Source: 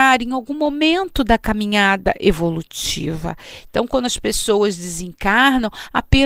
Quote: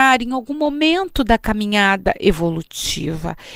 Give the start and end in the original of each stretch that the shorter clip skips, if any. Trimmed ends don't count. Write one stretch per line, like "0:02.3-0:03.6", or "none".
none